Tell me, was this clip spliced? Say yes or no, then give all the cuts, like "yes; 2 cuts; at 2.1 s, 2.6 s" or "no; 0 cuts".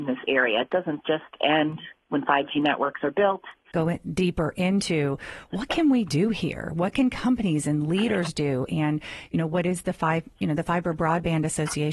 yes; 1 cut; at 3.7 s